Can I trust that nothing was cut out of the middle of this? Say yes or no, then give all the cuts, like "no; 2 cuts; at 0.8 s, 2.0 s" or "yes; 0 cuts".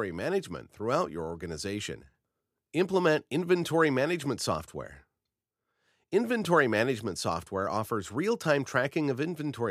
yes; 0 cuts